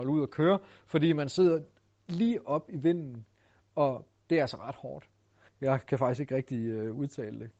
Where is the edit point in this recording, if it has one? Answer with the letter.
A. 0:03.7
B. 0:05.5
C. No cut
B